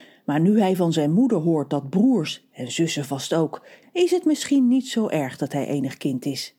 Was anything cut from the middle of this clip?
yes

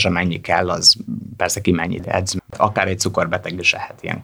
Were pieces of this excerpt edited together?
no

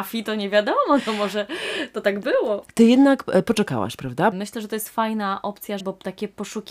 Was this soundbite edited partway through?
yes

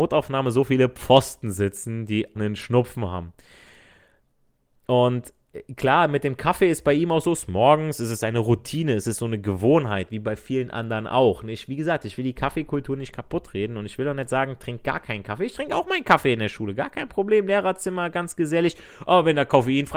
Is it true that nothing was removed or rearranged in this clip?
no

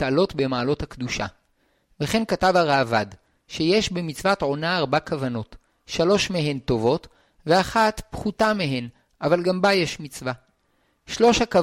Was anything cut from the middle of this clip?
no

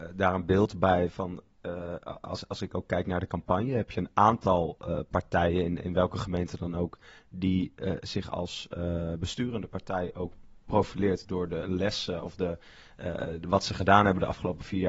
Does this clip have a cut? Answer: no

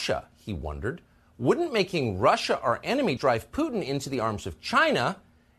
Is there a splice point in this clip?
yes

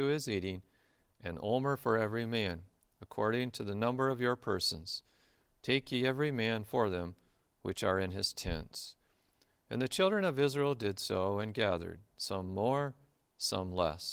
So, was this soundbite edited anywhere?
no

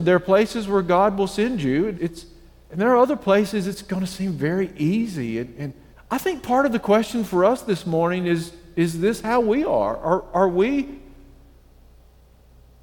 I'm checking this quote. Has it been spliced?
yes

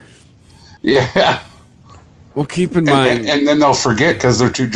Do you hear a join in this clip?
yes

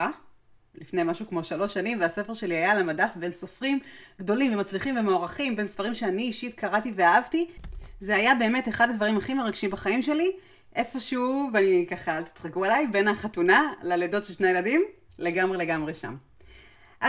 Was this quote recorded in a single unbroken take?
yes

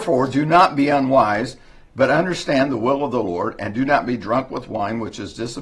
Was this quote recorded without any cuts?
yes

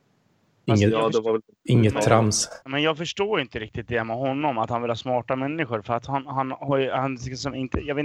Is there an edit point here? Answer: yes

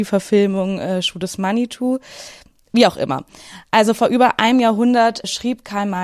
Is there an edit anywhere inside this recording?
no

